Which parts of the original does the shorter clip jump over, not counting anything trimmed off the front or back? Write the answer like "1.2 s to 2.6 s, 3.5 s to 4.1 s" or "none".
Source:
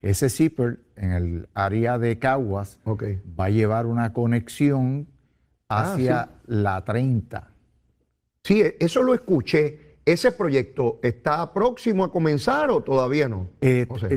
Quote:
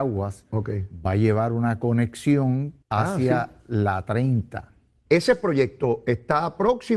5.2 s to 5.6 s, 7.9 s to 10.0 s